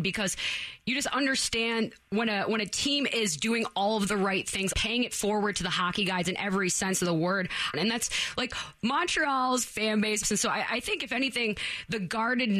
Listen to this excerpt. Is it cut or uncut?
cut